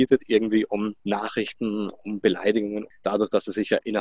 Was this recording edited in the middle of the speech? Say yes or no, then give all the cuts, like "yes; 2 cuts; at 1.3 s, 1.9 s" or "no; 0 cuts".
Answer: yes; 2 cuts; at 1.0 s, 2.9 s